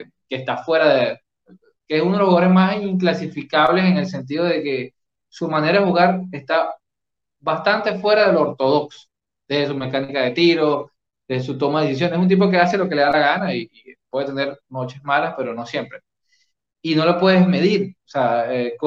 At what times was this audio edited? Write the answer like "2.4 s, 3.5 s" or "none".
none